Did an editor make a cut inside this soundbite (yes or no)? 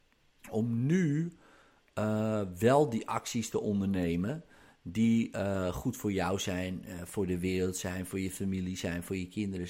no